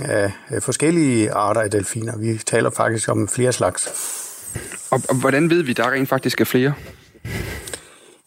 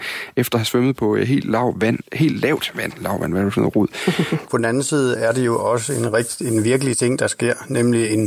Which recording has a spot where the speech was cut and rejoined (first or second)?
second